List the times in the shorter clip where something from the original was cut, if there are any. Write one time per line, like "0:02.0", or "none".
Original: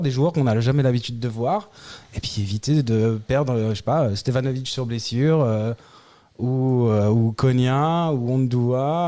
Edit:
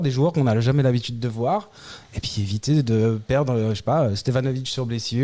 none